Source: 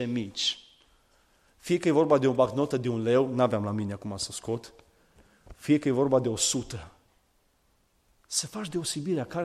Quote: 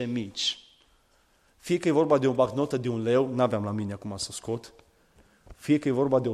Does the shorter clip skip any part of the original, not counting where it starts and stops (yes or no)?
no